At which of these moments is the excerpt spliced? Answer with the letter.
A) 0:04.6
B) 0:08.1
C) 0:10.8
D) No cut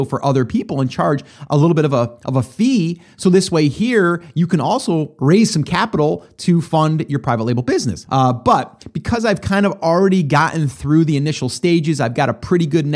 B